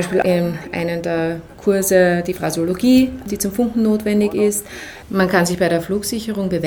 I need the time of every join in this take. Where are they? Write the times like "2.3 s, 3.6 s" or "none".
5.0 s